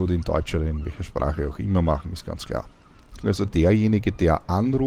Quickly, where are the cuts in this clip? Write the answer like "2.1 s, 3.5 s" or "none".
3.2 s